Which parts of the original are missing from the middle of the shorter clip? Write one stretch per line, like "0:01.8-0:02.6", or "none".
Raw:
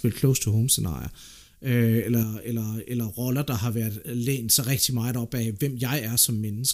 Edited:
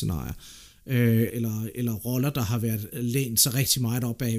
0:02.0-0:02.4